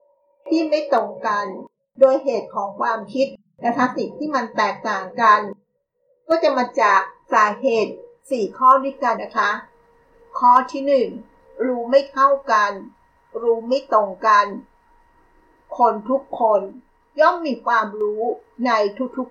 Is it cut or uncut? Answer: cut